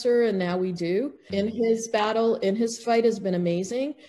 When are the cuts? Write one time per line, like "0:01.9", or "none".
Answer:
0:01.3